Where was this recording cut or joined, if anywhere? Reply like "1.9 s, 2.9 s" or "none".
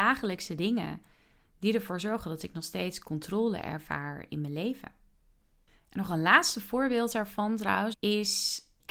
7.9 s